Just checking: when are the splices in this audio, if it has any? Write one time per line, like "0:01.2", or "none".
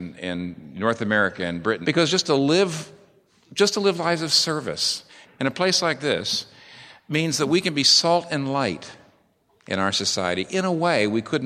0:01.8
0:05.2